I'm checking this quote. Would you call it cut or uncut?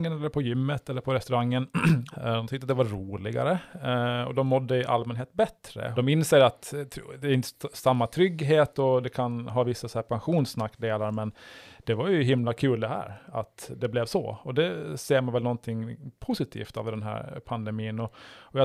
cut